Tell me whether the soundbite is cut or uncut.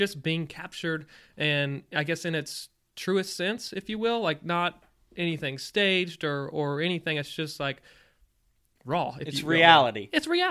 uncut